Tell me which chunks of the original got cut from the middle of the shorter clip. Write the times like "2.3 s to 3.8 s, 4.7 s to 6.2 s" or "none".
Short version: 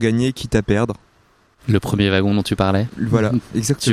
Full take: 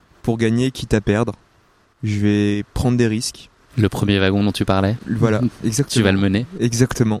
2.0 s to 3.7 s